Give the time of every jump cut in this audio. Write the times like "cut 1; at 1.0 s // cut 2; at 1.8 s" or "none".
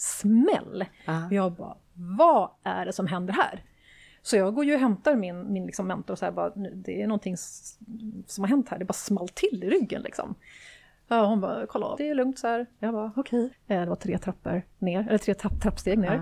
cut 1; at 12.0 s // cut 2; at 13.5 s